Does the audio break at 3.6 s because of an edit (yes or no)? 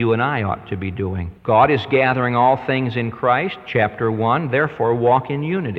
no